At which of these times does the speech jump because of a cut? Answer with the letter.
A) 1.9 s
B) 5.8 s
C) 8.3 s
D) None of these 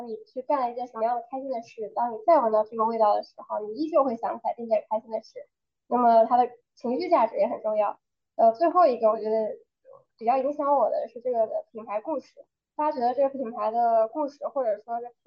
D